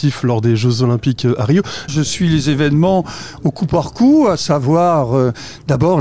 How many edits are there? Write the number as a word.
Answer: one